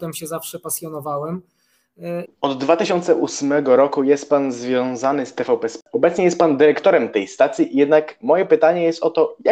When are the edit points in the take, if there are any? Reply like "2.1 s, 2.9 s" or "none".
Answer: 2.2 s